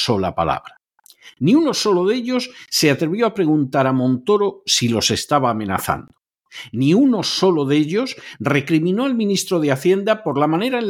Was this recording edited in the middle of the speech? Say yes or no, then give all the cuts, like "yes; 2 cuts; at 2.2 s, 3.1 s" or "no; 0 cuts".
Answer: no; 0 cuts